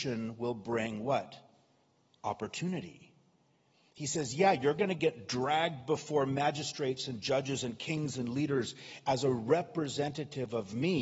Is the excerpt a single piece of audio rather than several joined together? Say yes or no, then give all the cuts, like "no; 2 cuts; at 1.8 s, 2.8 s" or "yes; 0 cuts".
yes; 0 cuts